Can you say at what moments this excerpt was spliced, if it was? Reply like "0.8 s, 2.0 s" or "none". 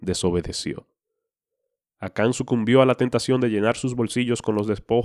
none